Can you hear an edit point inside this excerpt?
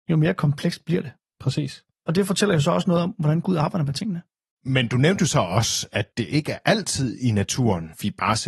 no; 0 cuts

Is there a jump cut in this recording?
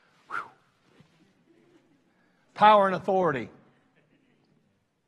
no; 0 cuts

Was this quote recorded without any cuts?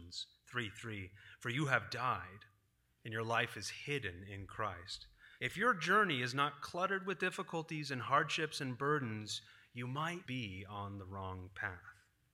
no; 2 cuts; at 5.4 s, 10.3 s

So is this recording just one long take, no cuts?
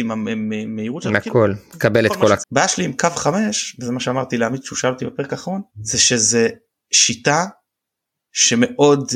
no; 2 cuts; at 2.4 s, 5.7 s

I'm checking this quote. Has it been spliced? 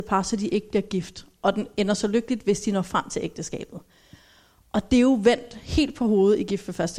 no; 0 cuts

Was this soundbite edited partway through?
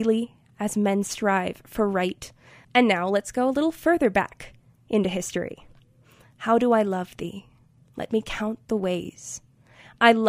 yes; 2 cuts; at 2.6 s, 6.3 s

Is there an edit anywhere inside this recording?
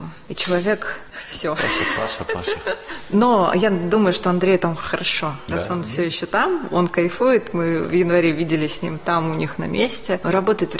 no; 0 cuts

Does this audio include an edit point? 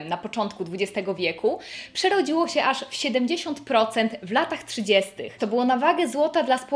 yes; 1 cut; at 5.4 s

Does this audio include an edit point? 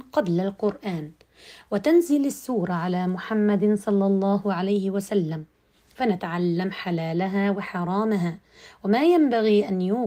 no; 0 cuts

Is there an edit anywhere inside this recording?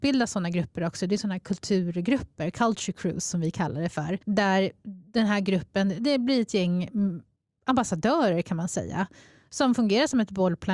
yes; 1 cut; at 4.2 s

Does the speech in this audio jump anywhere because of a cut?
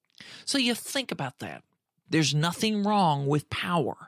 yes; 1 cut; at 2.1 s

